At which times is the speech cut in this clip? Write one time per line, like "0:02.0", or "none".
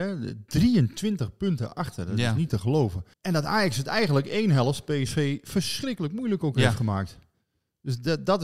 0:03.1